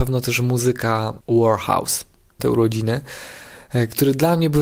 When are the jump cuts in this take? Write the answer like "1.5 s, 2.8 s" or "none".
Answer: 2.4 s